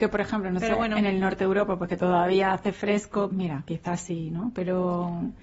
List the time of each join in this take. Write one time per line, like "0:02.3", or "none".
0:03.3